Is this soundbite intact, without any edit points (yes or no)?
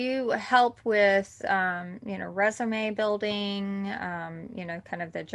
yes